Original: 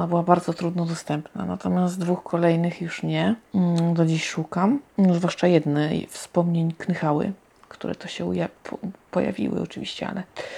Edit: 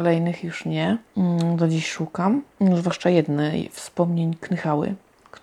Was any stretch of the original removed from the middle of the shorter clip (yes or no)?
no